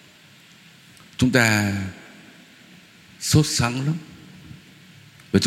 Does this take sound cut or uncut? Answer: uncut